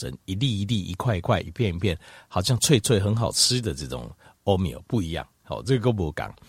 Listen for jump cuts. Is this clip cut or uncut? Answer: uncut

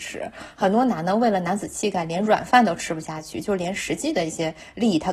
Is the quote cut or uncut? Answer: uncut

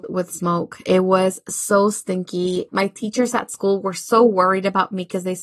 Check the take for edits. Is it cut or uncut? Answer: cut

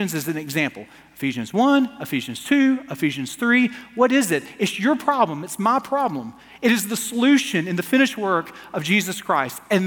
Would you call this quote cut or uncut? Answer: uncut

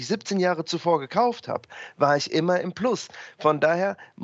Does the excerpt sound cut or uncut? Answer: uncut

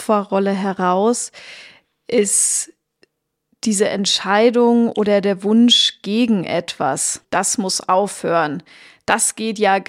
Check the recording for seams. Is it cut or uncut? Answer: cut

